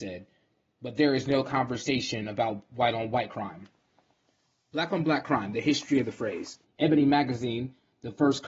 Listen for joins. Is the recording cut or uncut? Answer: cut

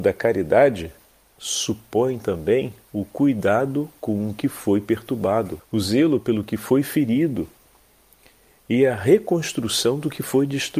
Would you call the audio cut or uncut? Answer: cut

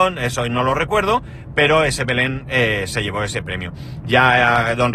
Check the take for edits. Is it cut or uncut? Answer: cut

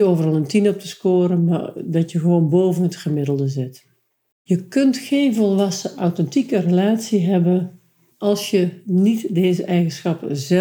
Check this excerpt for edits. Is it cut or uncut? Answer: cut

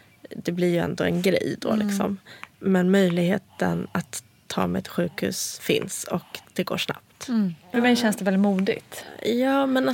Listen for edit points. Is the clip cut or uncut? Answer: cut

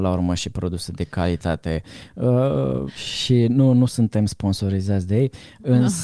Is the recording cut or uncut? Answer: cut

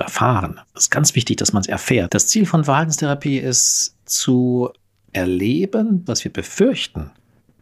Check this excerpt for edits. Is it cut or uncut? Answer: cut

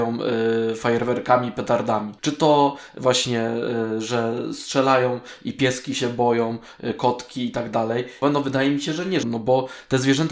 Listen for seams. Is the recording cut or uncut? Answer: cut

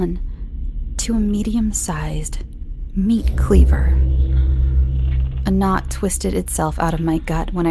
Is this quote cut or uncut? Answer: uncut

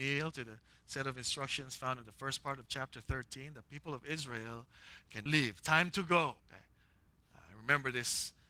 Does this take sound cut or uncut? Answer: cut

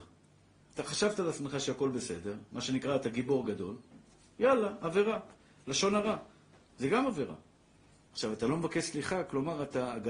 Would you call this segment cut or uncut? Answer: cut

